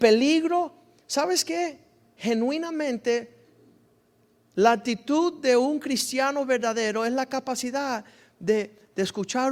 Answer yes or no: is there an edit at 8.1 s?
no